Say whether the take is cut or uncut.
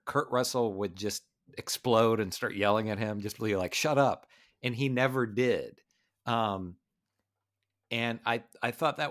uncut